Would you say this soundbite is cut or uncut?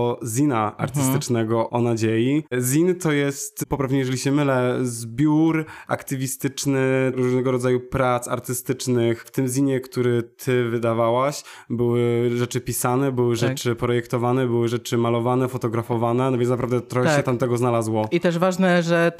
uncut